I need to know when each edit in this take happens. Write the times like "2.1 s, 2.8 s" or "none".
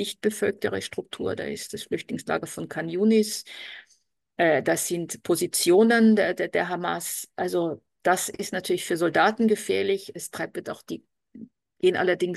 none